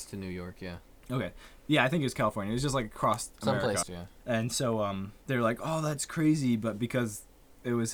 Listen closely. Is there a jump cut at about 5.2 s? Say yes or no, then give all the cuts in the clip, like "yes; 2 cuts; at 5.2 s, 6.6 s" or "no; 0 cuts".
yes; 2 cuts; at 3.8 s, 5.2 s